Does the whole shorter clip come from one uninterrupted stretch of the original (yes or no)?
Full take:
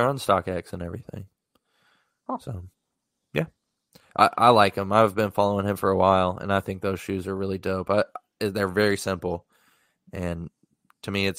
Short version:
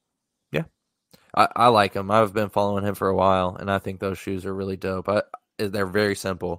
yes